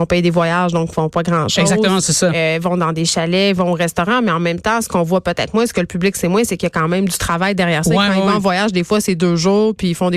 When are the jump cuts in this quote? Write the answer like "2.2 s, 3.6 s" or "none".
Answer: none